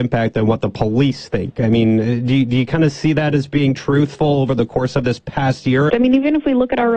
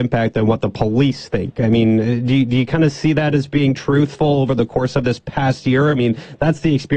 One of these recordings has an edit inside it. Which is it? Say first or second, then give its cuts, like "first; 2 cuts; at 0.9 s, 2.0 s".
first; 1 cut; at 5.9 s